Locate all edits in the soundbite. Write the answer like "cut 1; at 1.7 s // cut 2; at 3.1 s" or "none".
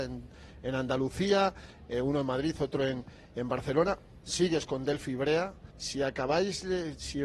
cut 1; at 5.7 s